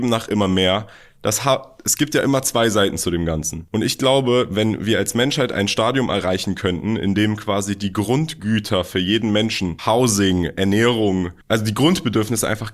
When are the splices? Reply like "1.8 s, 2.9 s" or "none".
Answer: 9.8 s

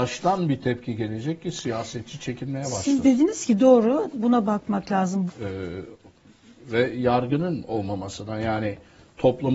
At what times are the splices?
4.1 s, 5.3 s

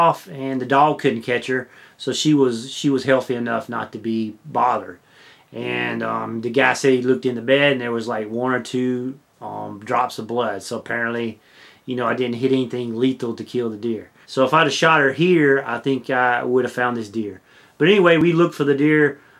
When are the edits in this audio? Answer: 14.2 s

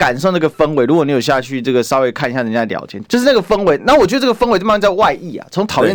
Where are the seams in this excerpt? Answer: 3.0 s

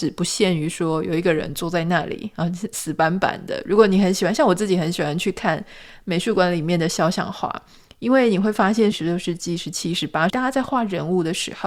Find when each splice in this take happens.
8.9 s, 10.3 s

